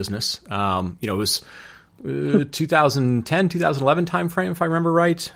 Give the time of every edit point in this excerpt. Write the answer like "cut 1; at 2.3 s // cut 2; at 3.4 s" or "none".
none